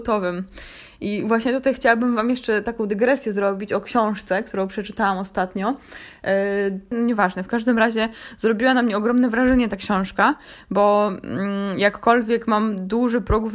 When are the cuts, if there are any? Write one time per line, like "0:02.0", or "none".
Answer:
0:06.9